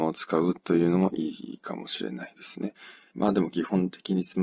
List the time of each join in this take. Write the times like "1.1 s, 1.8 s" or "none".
none